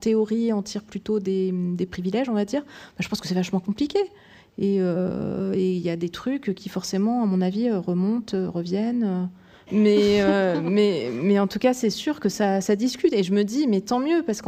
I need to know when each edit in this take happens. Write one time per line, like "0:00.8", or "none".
0:09.7